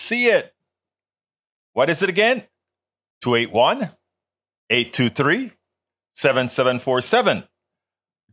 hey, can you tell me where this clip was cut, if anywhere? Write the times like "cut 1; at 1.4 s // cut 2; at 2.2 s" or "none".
cut 1; at 1.6 s